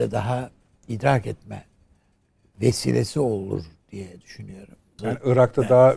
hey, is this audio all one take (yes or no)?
no